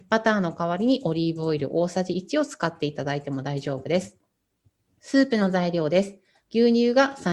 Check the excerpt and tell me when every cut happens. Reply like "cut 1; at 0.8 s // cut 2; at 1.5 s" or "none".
none